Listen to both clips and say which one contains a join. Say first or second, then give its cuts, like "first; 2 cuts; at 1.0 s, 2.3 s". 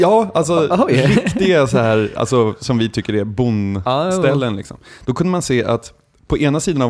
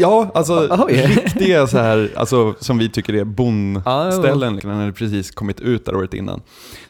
second; 1 cut; at 4.6 s